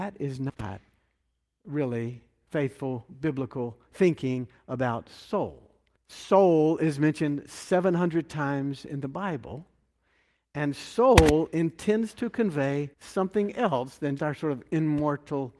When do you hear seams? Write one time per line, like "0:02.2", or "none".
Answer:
0:06.0
0:12.9
0:14.2